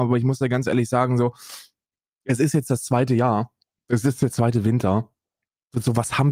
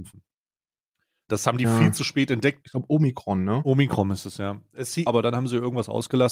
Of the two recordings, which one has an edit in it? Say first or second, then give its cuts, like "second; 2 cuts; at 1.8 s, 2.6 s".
second; 3 cuts; at 1.3 s, 2.6 s, 5.1 s